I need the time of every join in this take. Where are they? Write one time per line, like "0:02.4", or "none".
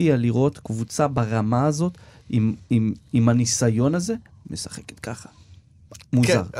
none

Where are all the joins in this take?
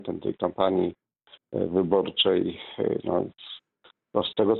0:03.0

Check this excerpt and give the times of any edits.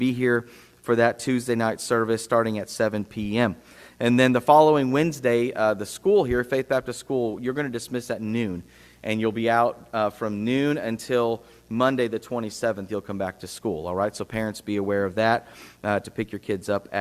none

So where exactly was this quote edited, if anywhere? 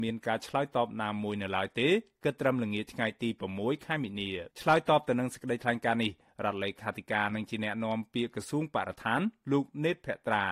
0:04.5

